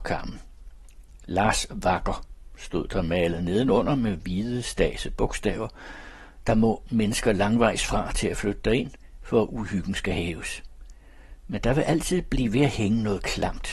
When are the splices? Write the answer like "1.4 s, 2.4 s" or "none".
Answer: 6.4 s